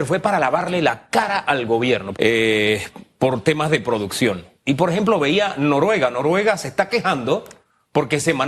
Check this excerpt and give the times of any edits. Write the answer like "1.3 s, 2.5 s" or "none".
2.1 s